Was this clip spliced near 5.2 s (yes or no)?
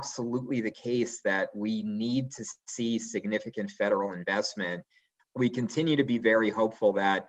yes